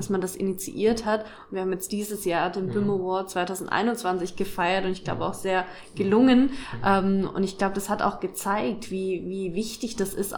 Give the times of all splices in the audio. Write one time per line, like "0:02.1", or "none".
none